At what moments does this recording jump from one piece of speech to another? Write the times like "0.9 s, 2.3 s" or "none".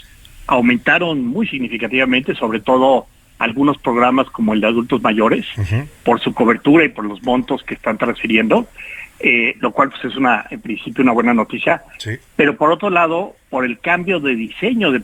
none